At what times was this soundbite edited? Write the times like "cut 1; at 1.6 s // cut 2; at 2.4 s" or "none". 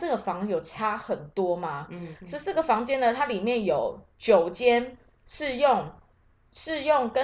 cut 1; at 2.1 s